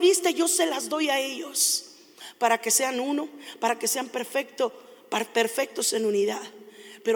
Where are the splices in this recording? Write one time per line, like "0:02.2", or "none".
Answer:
none

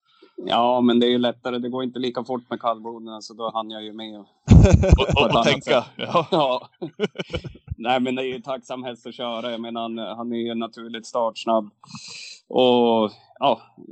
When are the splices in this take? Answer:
none

